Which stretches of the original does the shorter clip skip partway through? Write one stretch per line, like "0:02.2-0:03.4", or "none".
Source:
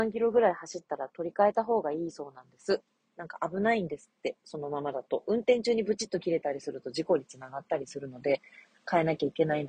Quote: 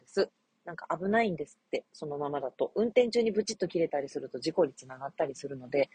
none